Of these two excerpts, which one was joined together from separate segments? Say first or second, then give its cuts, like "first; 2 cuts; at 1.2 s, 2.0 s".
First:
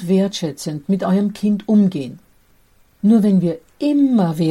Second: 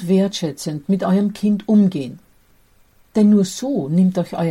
first; 1 cut; at 2.9 s